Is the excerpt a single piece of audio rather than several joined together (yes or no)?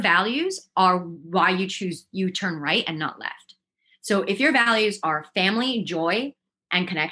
yes